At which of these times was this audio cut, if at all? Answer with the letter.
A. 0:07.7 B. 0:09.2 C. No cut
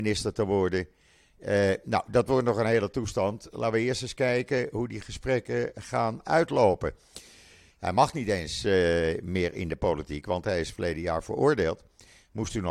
A